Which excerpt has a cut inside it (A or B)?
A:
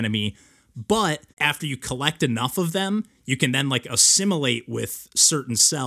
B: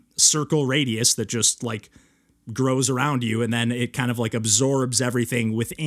A